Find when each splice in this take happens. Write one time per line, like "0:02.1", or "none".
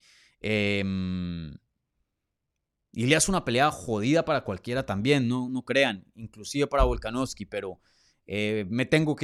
none